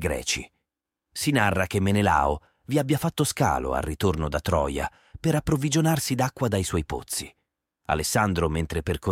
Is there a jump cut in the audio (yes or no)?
no